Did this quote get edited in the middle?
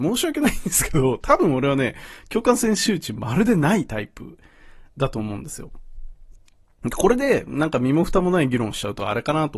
no; 0 cuts

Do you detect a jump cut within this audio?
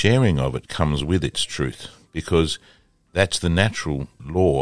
no; 0 cuts

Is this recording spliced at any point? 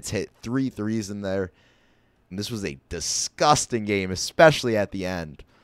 yes; 1 cut; at 2.3 s

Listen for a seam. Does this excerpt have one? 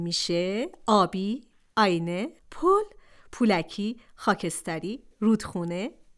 yes; 2 cuts; at 2.4 s, 5.1 s

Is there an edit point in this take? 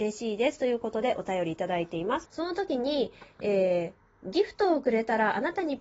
yes; 1 cut; at 2.2 s

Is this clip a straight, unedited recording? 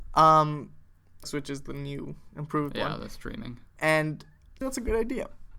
no; 2 cuts; at 1.2 s, 4.6 s

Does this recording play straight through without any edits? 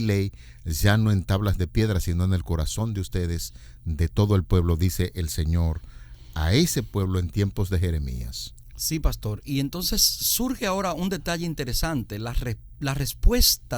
yes; 0 cuts

